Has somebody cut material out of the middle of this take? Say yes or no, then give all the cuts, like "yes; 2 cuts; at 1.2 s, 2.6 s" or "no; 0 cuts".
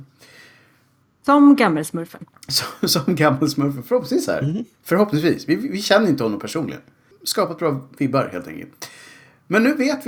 no; 0 cuts